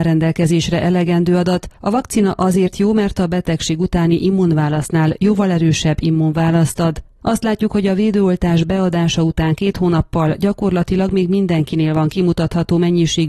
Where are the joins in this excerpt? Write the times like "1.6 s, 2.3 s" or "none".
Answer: none